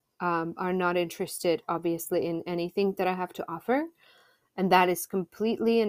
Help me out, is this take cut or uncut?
uncut